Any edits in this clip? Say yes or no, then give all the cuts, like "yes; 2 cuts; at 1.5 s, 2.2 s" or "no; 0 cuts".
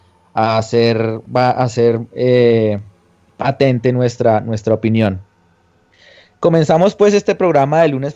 no; 0 cuts